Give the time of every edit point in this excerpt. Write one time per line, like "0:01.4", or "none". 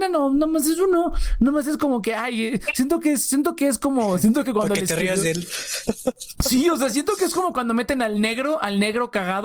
none